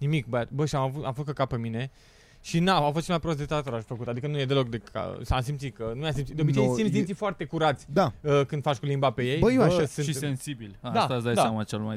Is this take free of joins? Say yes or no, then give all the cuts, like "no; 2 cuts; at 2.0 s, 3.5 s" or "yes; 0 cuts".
yes; 0 cuts